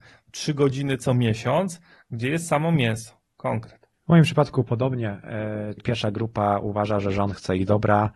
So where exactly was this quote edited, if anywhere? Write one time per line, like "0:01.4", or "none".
0:05.8